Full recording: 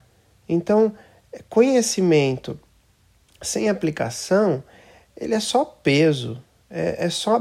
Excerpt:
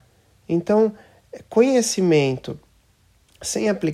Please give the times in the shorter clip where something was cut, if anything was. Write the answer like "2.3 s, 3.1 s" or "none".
none